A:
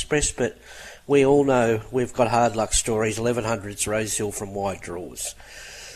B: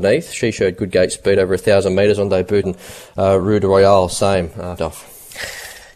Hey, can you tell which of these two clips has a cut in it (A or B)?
B